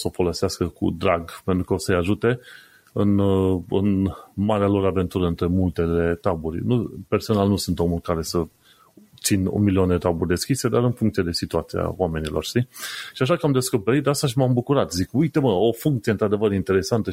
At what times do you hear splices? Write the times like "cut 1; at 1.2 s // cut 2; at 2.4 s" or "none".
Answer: none